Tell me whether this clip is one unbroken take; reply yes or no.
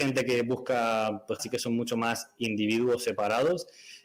no